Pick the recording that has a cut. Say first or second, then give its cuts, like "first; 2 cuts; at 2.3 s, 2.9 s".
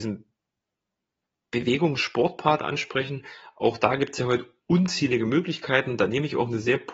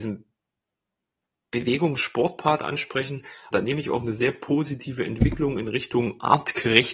second; 1 cut; at 3.5 s